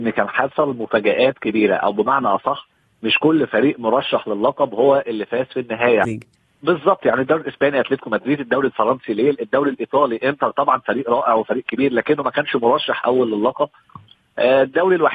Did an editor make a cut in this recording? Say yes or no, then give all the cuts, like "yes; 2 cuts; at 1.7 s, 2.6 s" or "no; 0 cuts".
yes; 1 cut; at 6.0 s